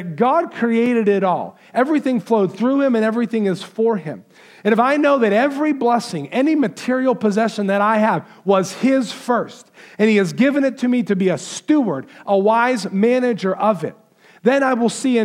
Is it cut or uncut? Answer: uncut